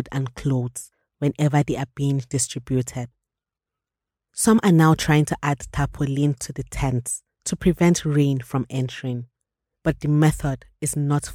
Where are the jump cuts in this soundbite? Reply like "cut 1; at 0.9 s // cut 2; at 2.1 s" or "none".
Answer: cut 1; at 4.3 s

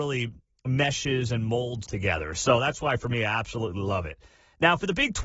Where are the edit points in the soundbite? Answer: cut 1; at 1.9 s

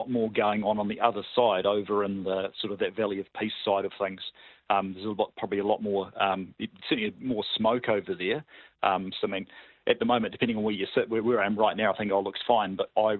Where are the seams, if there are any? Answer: cut 1; at 9.2 s

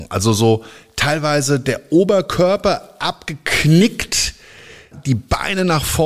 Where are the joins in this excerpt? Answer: cut 1; at 4.9 s

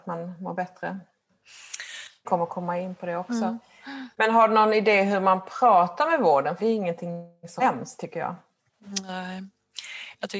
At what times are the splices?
cut 1; at 2.2 s // cut 2; at 6.6 s

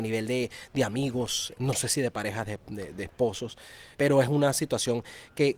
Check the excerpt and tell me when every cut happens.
cut 1; at 1.5 s // cut 2; at 3.9 s

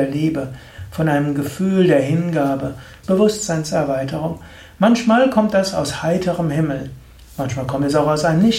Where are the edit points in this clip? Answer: cut 1; at 3.0 s

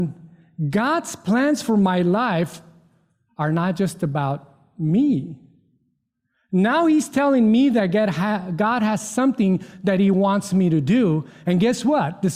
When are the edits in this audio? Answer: none

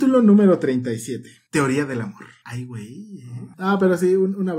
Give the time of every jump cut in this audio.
cut 1; at 2.4 s // cut 2; at 3.5 s

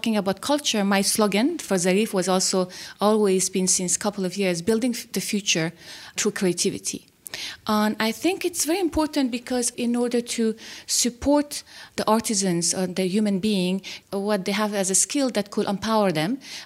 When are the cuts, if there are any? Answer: cut 1; at 14.0 s

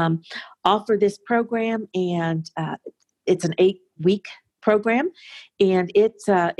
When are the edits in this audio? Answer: none

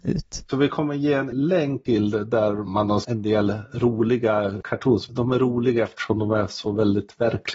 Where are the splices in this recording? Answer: cut 1; at 5.1 s

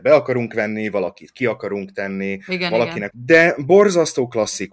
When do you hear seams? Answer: cut 1; at 3.1 s

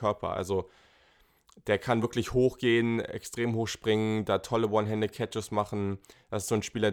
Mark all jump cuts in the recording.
none

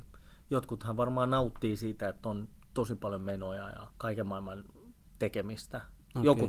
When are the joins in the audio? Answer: cut 1; at 3.9 s

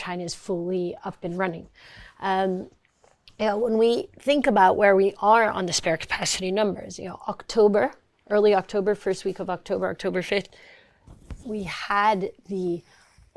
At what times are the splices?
cut 1; at 11.4 s

